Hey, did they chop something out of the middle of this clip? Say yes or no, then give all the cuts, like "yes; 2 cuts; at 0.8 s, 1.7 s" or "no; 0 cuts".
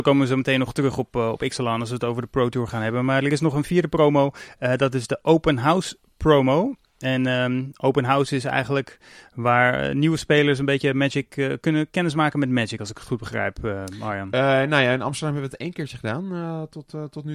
no; 0 cuts